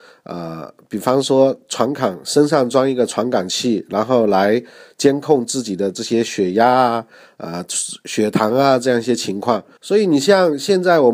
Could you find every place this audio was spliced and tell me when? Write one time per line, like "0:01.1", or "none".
0:09.8